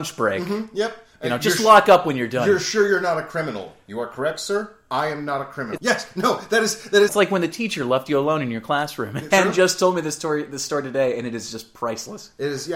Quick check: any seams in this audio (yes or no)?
yes